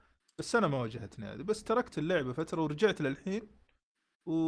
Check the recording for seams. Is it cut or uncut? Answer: uncut